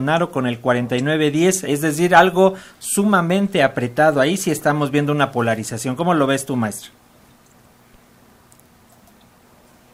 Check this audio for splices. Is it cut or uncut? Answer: uncut